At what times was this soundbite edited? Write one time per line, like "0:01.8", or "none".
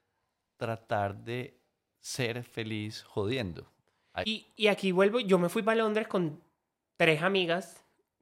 0:04.2

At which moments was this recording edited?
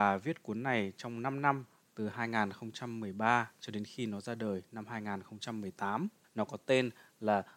0:06.2

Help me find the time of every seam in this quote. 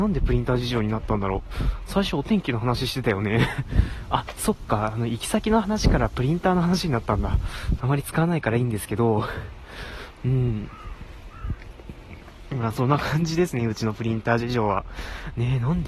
0:07.8

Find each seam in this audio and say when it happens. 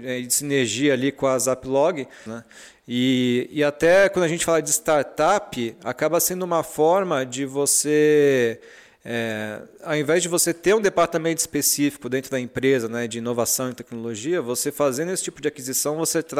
0:02.3

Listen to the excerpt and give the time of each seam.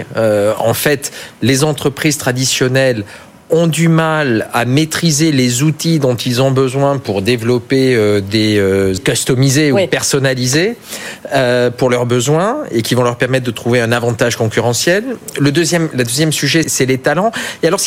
0:09.0
0:16.6

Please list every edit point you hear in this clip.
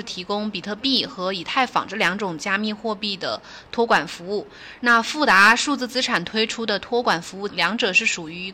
0:04.8
0:07.5

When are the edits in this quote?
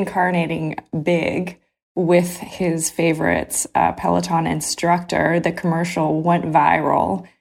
none

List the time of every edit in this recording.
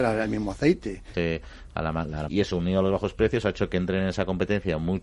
0:01.1
0:02.3

